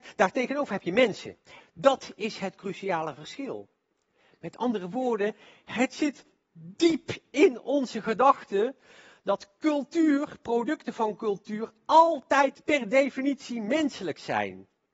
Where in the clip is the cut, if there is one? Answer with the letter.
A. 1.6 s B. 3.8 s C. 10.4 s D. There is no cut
A